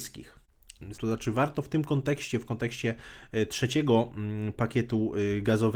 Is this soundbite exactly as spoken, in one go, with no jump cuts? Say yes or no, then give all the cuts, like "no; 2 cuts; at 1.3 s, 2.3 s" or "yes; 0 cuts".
no; 1 cut; at 0.9 s